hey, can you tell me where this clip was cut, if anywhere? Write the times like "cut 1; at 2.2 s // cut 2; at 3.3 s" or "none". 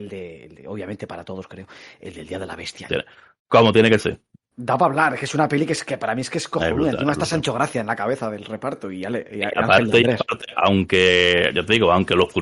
cut 1; at 2.9 s